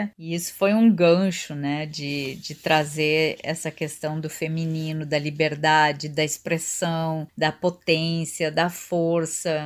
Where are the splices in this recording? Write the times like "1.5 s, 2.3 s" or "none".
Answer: none